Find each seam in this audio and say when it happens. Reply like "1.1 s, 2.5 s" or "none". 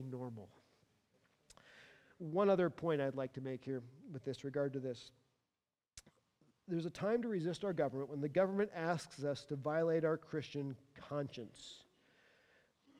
none